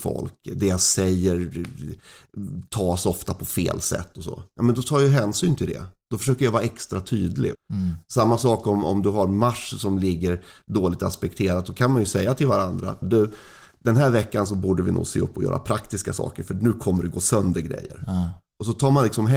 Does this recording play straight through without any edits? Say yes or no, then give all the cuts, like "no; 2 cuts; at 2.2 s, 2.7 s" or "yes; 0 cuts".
no; 2 cuts; at 7.5 s, 13.0 s